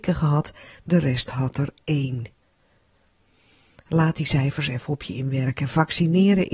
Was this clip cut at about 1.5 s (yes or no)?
no